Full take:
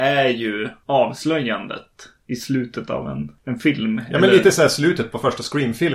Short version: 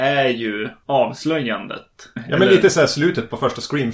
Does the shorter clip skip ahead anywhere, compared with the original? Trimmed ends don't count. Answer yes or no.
yes